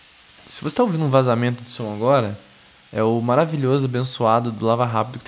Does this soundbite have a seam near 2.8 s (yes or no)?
no